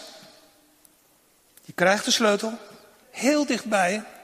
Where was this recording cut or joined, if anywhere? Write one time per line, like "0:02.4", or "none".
0:03.0